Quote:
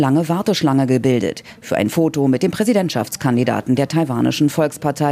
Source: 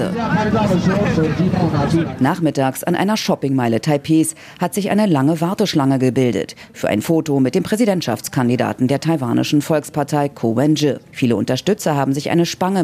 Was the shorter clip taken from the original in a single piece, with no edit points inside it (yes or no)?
yes